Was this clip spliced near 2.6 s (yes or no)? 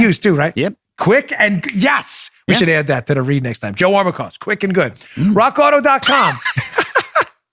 no